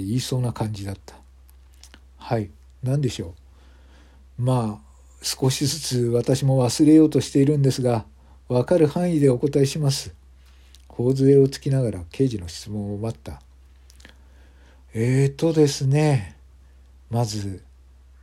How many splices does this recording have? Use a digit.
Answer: 0